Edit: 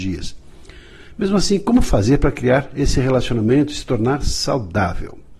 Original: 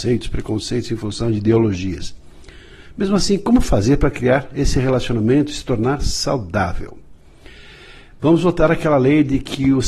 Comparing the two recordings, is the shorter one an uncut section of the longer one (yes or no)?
yes